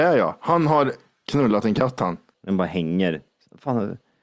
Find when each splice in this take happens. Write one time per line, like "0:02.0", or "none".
0:02.3